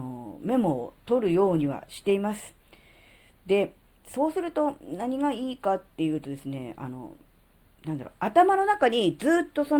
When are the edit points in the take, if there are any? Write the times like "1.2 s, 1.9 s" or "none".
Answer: none